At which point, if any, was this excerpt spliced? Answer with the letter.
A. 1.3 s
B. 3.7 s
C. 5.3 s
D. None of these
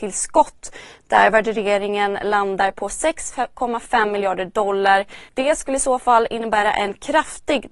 C